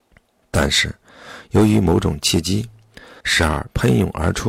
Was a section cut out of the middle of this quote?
yes; 1 cut; at 3.2 s

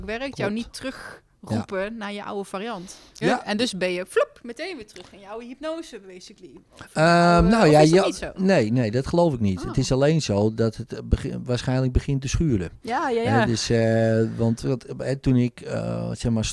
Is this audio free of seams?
no; 1 cut; at 3.2 s

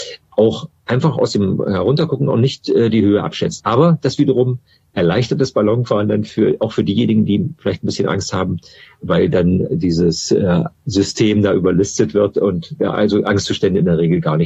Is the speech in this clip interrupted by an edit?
yes; 1 cut; at 3.6 s

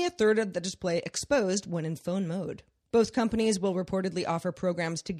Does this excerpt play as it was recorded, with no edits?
no; 1 cut; at 2.9 s

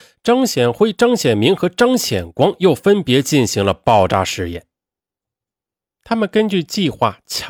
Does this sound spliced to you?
yes; 1 cut; at 6.0 s

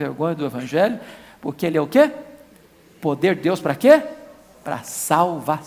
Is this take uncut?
yes; 0 cuts

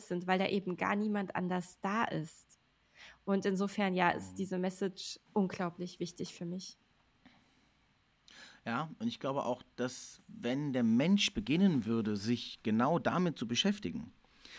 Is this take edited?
yes; 1 cut; at 5.3 s

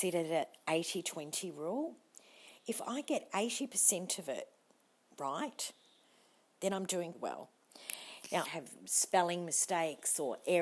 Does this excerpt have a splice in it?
yes; 2 cuts; at 7.1 s, 8.4 s

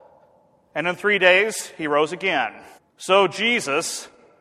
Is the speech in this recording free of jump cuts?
no; 1 cut; at 2.8 s

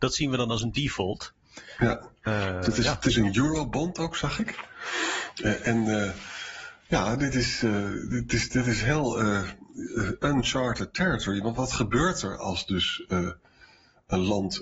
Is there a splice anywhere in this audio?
no; 0 cuts

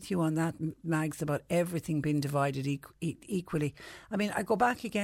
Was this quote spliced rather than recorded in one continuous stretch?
no; 0 cuts

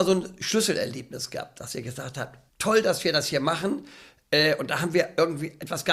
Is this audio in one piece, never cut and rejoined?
no; 1 cut; at 2.5 s

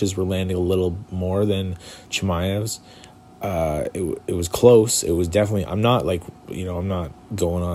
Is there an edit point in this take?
no; 0 cuts

